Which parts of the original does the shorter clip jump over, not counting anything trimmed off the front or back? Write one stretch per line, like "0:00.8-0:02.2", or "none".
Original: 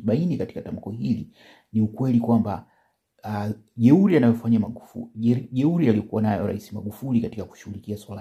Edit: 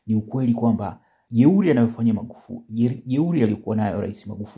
0:02.9-0:03.7